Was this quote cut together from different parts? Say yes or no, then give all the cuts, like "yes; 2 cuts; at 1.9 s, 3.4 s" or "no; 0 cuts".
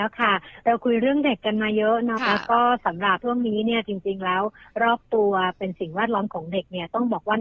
yes; 1 cut; at 2.2 s